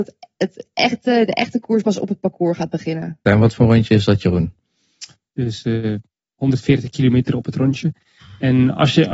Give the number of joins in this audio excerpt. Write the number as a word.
two